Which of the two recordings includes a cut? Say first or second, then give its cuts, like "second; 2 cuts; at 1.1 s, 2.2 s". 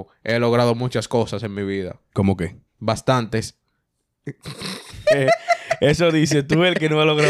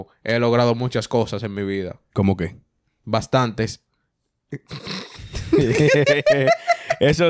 first; 2 cuts; at 2.7 s, 5.0 s